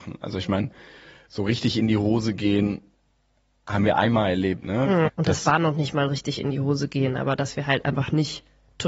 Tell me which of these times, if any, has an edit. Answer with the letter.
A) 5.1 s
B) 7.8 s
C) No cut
A